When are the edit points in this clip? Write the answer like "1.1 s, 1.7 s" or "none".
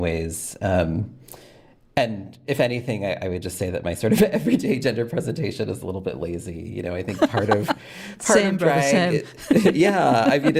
none